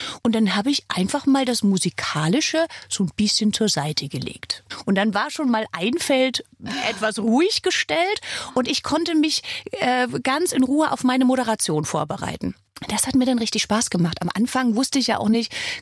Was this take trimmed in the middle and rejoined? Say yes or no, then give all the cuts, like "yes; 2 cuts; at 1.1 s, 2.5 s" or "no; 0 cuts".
no; 0 cuts